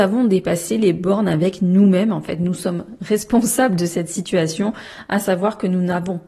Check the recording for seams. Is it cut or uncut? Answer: uncut